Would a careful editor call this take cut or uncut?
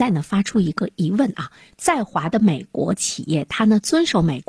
uncut